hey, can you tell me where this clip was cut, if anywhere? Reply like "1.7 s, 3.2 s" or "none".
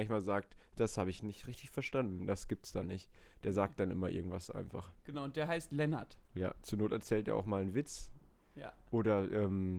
none